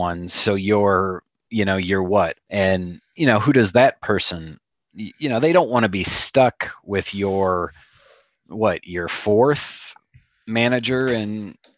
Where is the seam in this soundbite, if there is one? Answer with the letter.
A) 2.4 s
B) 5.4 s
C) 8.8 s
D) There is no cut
A